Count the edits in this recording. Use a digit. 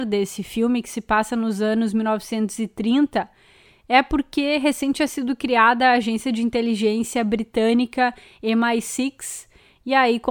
0